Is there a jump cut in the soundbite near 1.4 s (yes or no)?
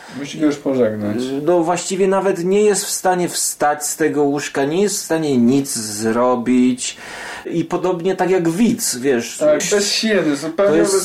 no